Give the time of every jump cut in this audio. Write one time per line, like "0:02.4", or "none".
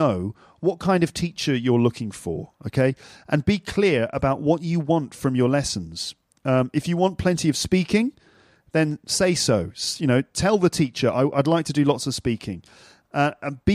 none